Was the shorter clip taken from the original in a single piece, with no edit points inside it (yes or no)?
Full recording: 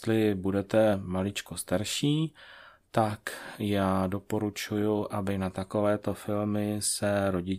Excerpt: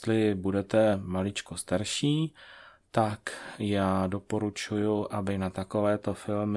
yes